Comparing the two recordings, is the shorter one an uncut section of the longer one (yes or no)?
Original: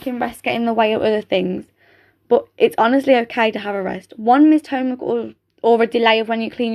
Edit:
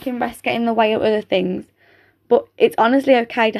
yes